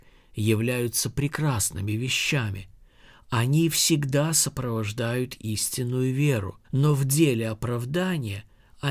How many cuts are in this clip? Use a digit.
1